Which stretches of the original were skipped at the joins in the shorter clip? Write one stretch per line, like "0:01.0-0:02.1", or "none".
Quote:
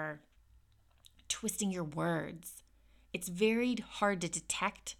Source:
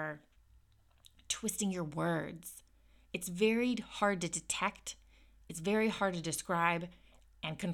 none